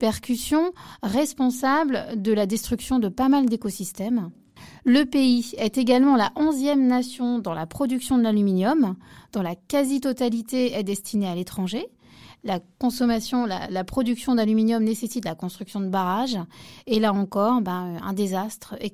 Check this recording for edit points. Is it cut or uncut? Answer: uncut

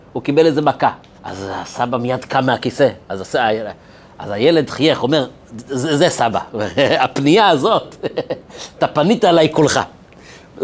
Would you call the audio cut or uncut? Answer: cut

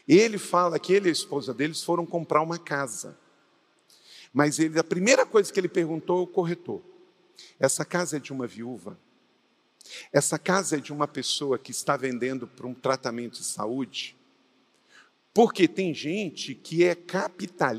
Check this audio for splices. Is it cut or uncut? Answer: uncut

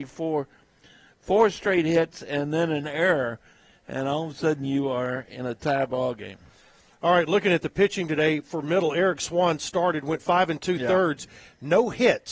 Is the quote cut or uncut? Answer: uncut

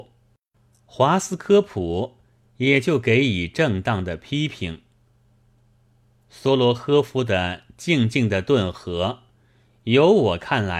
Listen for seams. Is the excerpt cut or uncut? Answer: uncut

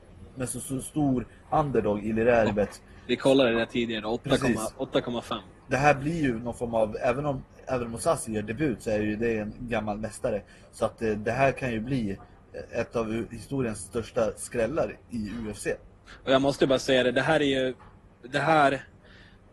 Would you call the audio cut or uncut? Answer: cut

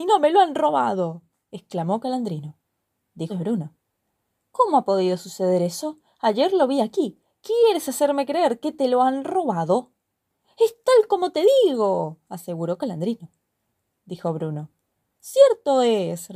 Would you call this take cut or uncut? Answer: cut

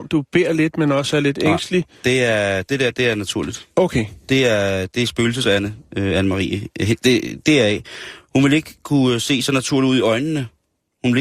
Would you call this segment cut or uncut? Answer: uncut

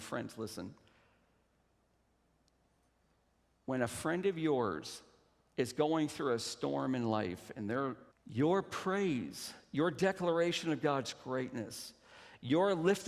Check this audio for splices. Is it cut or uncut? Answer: cut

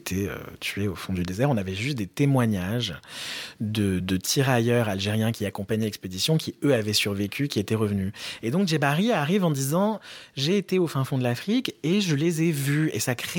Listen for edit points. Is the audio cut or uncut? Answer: cut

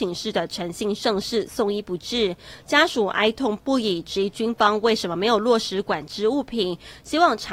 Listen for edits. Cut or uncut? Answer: uncut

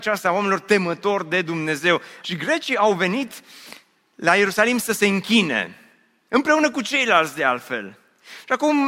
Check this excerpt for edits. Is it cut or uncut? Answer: cut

